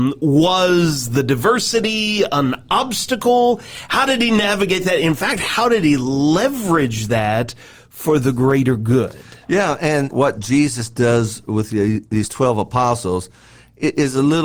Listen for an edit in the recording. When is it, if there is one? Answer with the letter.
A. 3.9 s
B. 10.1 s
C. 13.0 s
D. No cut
B